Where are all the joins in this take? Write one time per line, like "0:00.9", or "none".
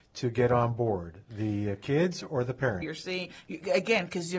0:02.8